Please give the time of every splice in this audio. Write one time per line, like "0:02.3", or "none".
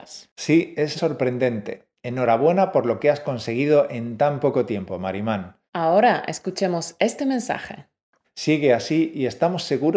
0:01.0
0:05.7
0:08.2

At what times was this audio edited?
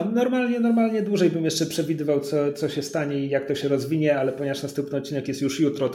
none

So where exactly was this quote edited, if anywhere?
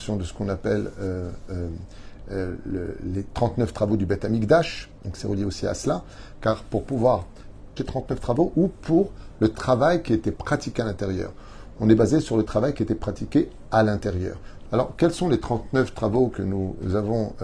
0:07.8
0:14.7

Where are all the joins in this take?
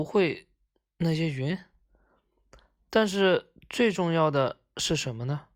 none

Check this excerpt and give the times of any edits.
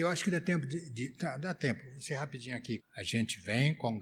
0:02.8

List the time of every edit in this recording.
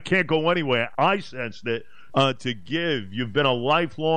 0:00.9
0:02.1

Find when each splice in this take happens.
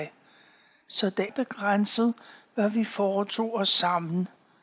0:01.3

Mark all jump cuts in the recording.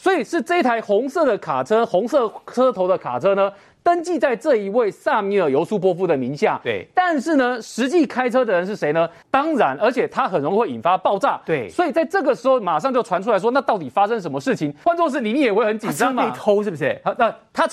0:09.2
0:14.8

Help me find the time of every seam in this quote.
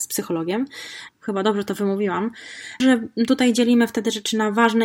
0:01.1
0:02.8

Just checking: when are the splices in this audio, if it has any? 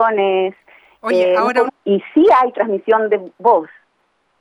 0:01.7

